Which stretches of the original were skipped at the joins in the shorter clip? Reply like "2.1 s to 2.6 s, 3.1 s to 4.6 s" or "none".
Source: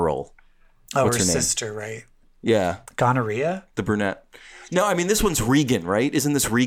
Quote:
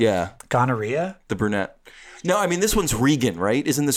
none

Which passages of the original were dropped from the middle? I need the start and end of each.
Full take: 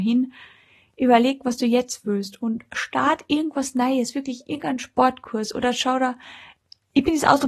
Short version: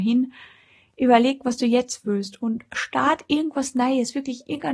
none

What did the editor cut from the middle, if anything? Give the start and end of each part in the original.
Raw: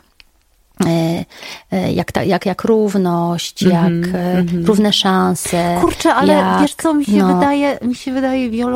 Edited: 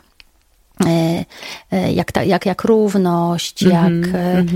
none

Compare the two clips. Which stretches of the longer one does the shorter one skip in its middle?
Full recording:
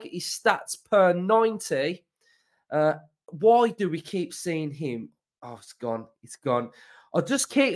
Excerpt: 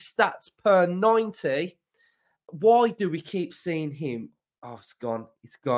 2.6 s to 3.1 s

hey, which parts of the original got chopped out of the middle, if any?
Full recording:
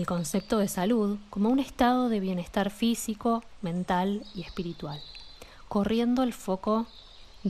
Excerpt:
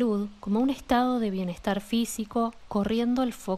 3.6 s to 5.7 s

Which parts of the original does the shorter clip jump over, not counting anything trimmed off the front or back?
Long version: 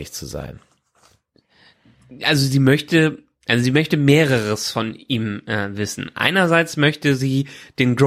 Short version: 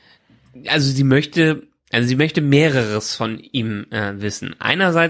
none

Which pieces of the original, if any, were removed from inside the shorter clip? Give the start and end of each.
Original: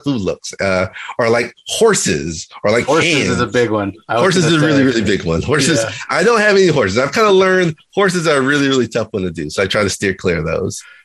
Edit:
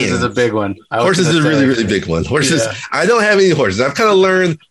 none

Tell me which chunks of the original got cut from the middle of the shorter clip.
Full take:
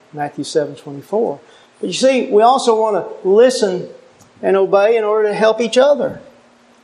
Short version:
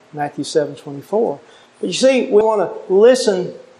2.4 s to 2.8 s

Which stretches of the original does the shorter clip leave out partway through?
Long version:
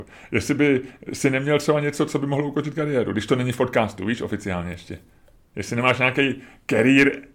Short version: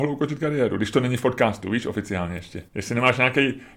5.0 s to 5.5 s

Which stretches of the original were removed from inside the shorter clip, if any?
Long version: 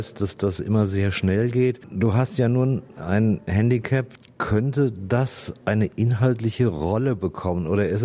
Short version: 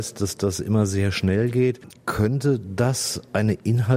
1.9 s to 4.2 s

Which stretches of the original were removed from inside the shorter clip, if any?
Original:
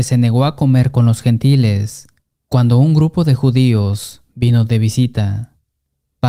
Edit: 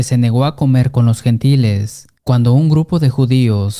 2.2 s to 2.4 s

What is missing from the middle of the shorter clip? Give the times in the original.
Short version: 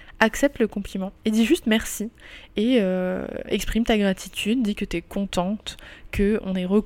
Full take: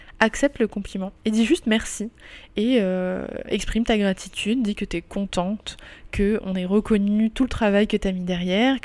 none

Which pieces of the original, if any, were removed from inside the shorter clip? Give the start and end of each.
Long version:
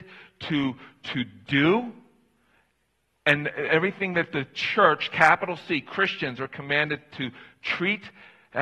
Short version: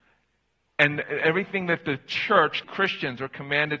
5.1 s to 5.8 s

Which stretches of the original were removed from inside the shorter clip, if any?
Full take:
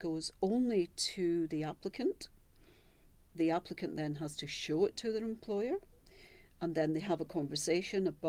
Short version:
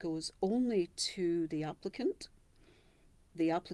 none

